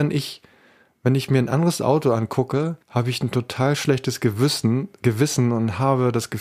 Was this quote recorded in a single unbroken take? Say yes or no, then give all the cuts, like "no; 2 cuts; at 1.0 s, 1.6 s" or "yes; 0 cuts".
no; 1 cut; at 2.8 s